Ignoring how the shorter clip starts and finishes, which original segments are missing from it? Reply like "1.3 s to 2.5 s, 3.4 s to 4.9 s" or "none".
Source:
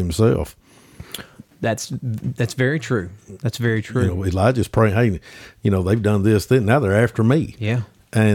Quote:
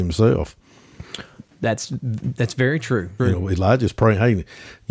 3.2 s to 3.9 s

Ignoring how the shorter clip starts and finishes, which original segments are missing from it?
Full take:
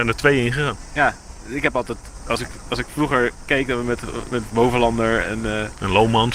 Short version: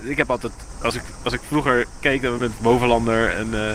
3.8 s to 4.3 s

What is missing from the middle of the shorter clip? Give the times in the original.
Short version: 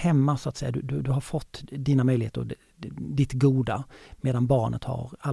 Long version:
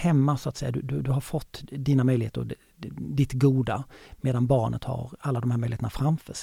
none

